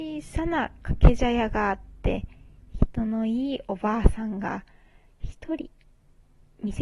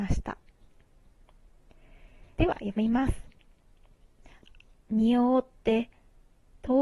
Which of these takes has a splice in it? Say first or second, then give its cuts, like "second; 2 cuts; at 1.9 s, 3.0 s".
second; 2 cuts; at 2.4 s, 4.7 s